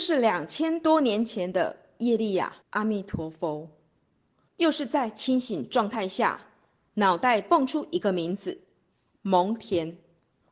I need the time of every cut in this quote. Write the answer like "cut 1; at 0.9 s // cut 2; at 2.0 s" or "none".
cut 1; at 2.6 s // cut 2; at 4.5 s